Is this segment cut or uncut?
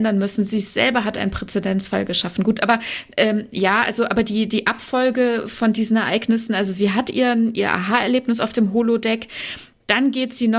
uncut